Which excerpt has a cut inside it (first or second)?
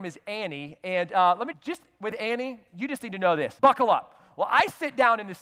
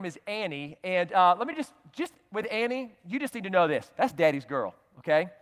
first